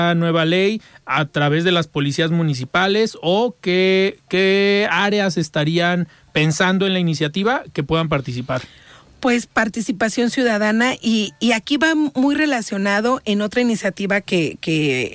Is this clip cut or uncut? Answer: uncut